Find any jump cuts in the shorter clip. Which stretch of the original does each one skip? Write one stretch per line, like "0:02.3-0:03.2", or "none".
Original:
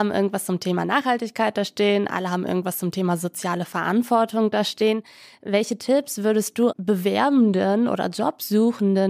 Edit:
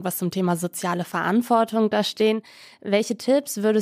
none